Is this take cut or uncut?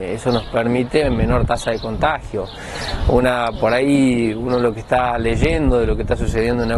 uncut